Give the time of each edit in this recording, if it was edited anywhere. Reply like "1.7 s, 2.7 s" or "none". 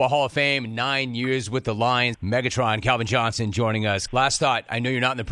2.1 s, 4.1 s